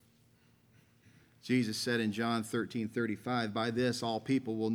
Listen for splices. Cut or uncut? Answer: uncut